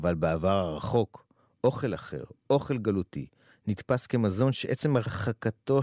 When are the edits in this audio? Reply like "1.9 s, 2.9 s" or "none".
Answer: 3.5 s

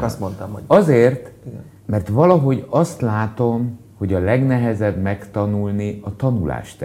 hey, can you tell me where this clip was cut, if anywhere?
1.8 s

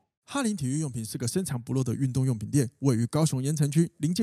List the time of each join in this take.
none

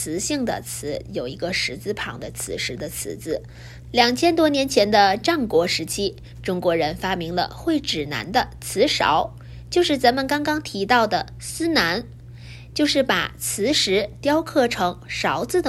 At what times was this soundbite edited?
3.8 s

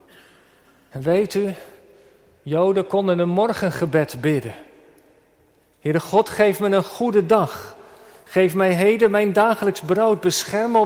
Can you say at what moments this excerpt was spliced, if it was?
none

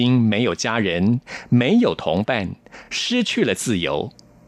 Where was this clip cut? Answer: none

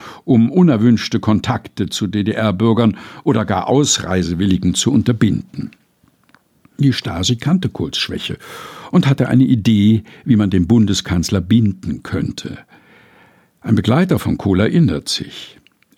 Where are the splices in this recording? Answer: none

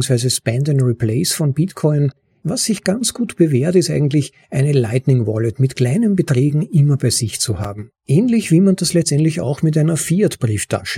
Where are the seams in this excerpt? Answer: 8.0 s

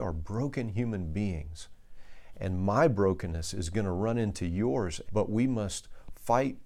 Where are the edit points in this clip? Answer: 5.1 s

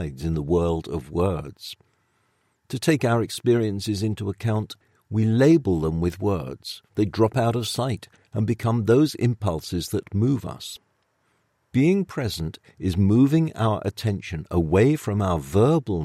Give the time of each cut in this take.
6.9 s

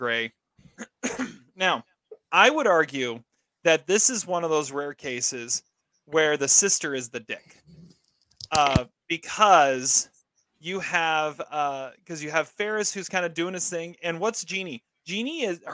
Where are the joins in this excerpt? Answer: none

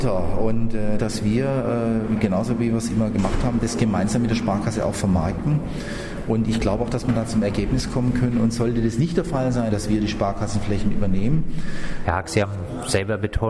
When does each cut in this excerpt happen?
1.0 s, 9.7 s, 12.0 s

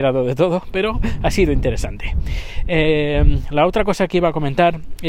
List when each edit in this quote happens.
none

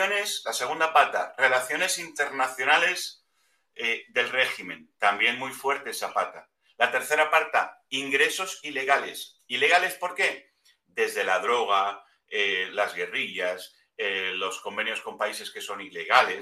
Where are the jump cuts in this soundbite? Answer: none

